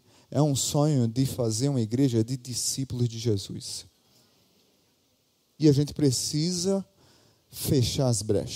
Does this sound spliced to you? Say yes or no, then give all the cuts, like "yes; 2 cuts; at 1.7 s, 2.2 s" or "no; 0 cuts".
yes; 1 cut; at 5.6 s